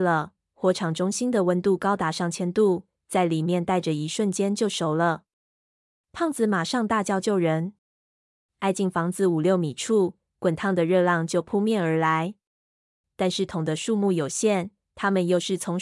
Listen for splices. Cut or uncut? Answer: cut